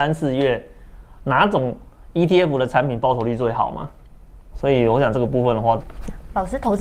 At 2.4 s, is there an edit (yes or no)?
no